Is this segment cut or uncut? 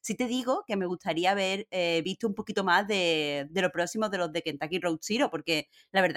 uncut